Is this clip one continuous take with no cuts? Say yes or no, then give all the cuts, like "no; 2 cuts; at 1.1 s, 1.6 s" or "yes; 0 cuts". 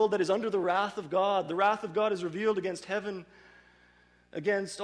yes; 0 cuts